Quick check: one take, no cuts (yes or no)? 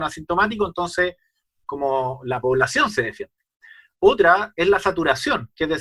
yes